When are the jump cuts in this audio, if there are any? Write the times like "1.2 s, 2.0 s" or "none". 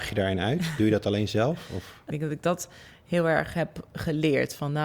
2.1 s